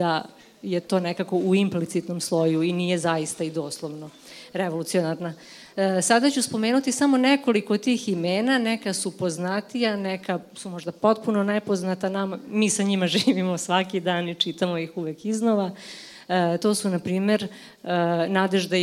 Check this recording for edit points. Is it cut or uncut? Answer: uncut